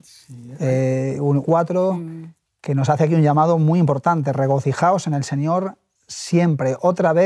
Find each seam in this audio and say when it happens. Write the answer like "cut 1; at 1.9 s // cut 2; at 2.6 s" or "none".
cut 1; at 1.4 s